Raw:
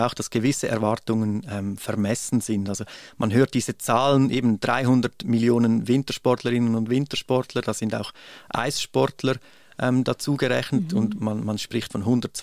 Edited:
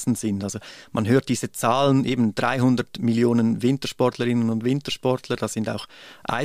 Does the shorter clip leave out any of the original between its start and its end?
no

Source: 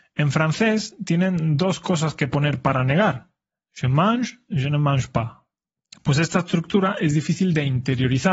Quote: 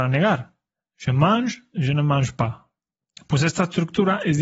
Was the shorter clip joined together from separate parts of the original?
no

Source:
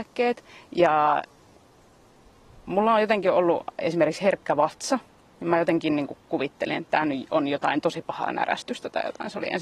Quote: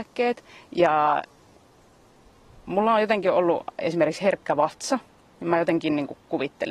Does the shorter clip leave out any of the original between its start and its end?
no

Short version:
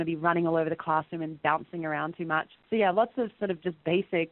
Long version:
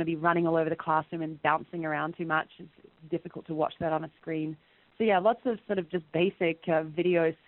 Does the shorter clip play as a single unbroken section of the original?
no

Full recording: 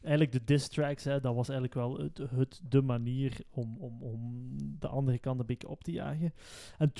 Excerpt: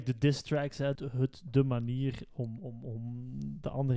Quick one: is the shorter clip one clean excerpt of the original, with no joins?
no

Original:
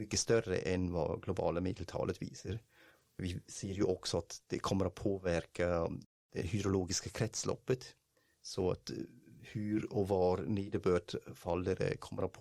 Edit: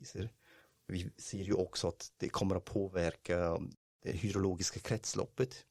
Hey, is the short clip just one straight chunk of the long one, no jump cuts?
yes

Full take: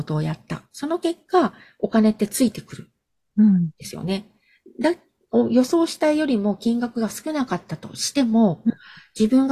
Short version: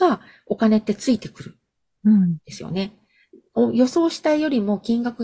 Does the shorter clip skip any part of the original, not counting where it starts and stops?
yes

